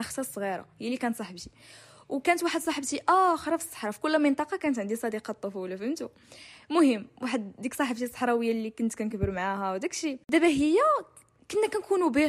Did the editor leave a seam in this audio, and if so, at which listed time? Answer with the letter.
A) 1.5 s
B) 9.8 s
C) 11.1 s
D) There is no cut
D